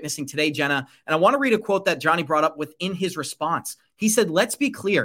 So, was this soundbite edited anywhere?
no; 0 cuts

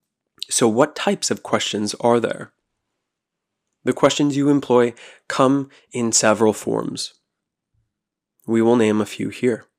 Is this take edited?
no; 0 cuts

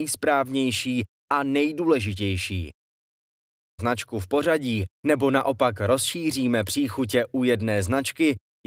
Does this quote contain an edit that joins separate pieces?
yes; 1 cut; at 3.8 s

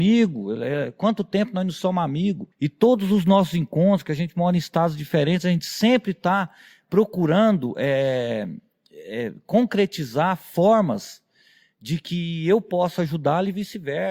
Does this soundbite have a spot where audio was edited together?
yes; 1 cut; at 2.5 s

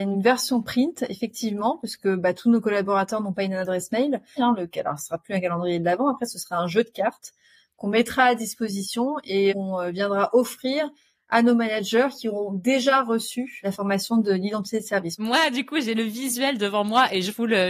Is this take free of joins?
no; 2 cuts; at 4.4 s, 15.2 s

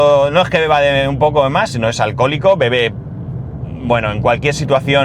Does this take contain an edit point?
no; 0 cuts

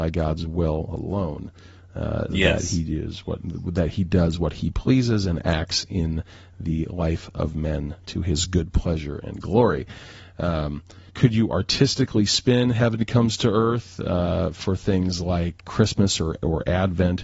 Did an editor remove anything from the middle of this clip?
yes; 2 cuts; at 11.1 s, 15.6 s

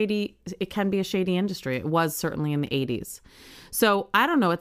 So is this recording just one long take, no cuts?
yes; 0 cuts

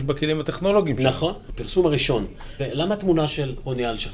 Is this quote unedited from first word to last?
no; 2 cuts; at 1.5 s, 2.6 s

